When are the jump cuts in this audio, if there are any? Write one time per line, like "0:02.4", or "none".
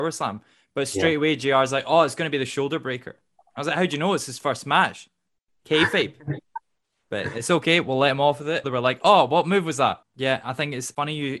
0:08.6
0:10.0